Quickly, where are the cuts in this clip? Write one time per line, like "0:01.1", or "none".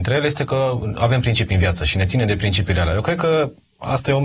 none